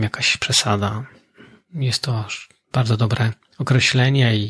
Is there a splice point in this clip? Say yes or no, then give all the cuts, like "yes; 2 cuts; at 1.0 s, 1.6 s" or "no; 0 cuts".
no; 0 cuts